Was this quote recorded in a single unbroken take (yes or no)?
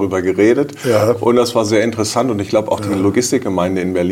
yes